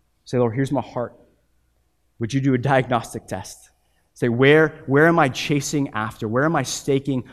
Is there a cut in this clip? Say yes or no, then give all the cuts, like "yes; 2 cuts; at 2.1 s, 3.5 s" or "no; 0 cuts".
no; 0 cuts